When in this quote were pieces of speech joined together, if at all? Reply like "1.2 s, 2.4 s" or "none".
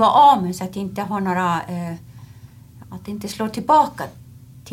2.8 s